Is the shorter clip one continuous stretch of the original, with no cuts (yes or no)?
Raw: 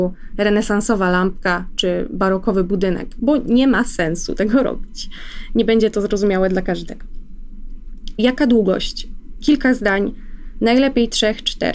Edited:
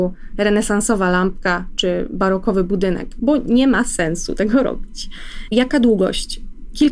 no